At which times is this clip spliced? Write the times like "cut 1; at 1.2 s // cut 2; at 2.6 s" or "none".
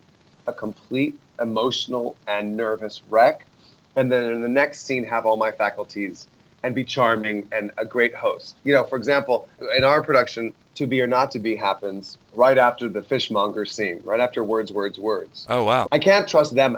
cut 1; at 15.8 s